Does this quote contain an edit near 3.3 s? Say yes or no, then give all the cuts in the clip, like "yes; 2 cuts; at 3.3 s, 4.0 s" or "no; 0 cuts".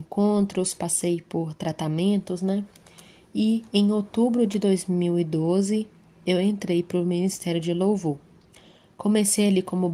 no; 0 cuts